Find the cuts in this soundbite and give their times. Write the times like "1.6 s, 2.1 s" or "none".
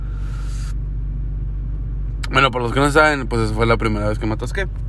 none